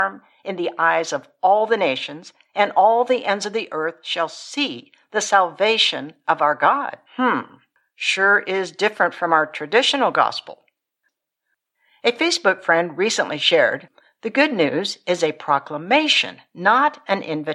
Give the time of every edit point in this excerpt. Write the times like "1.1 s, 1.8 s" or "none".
7.1 s